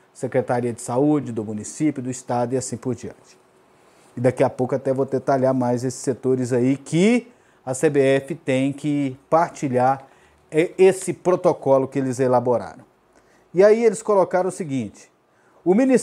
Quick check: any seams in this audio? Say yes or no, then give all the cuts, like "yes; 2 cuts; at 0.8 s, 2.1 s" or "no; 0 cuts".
no; 0 cuts